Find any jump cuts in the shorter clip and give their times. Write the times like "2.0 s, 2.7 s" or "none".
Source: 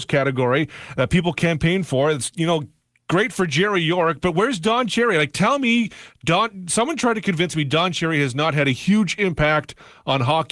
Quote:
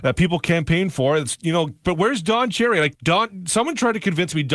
1.8 s, 2.9 s